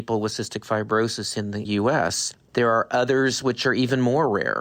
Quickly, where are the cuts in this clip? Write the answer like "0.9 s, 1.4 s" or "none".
none